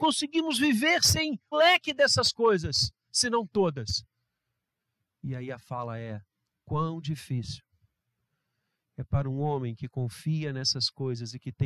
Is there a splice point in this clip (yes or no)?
yes